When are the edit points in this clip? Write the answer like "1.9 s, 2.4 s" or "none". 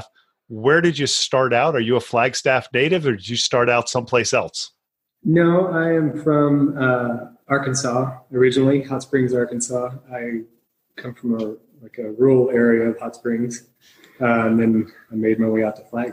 none